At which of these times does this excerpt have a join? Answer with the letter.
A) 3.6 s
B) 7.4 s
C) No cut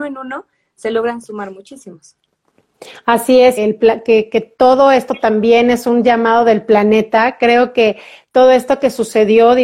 A